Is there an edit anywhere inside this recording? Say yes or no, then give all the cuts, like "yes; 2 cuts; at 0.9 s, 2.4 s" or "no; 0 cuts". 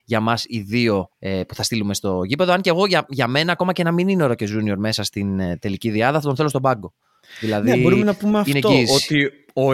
yes; 1 cut; at 1.1 s